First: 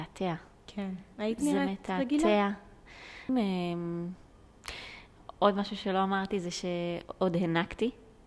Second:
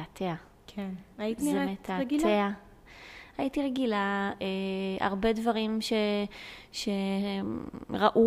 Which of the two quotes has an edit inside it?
first; 1 cut; at 3.3 s

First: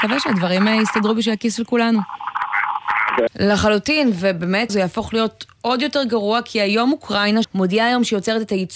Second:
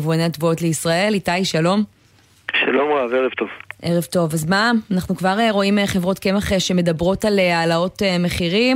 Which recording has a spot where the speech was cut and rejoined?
first; 3 cuts; at 3.3 s, 4.7 s, 7.4 s

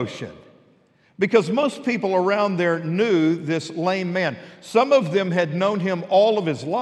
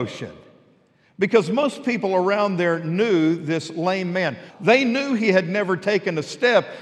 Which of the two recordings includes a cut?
second; 1 cut; at 4.5 s

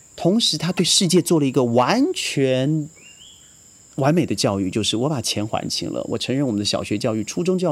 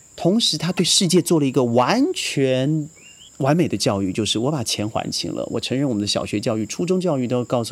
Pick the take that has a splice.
second; 1 cut; at 3.3 s

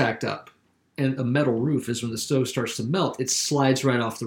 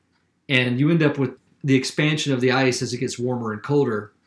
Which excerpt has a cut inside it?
first; 1 cut; at 1.2 s

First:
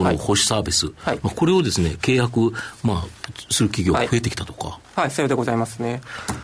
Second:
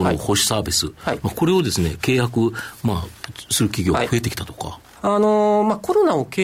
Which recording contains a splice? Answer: second; 1 cut; at 5.0 s

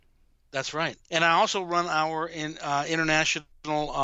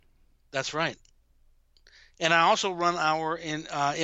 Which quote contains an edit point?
first; 1 cut; at 1.0 s

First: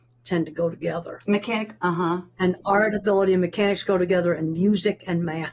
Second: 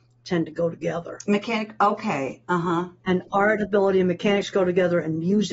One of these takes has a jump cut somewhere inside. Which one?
first; 1 cut; at 1.8 s

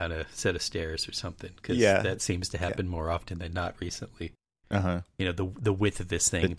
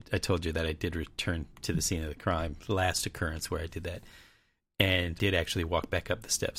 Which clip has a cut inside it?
first; 1 cut; at 4.6 s

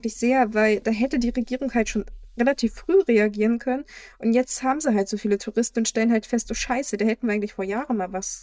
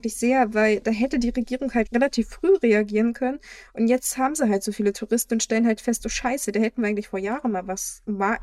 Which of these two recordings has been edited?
second; 1 cut; at 1.9 s

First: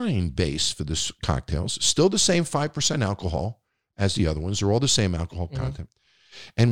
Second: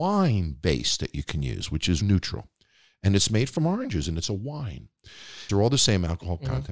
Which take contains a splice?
second; 2 cuts; at 2.0 s, 5.5 s

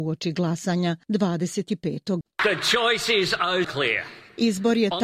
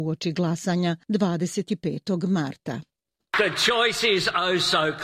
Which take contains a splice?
first; 2 cuts; at 2.2 s, 3.6 s

